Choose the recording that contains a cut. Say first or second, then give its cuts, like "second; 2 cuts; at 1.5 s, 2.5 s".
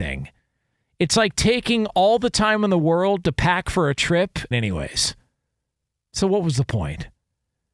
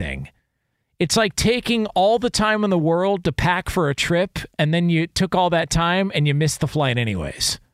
first; 1 cut; at 4.5 s